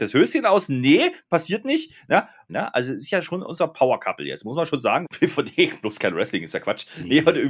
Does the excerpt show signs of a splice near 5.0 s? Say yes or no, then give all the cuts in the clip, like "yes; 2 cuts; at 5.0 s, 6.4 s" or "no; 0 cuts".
yes; 2 cuts; at 2.5 s, 5.0 s